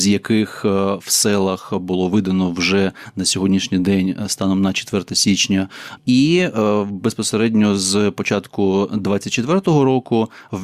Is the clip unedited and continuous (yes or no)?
no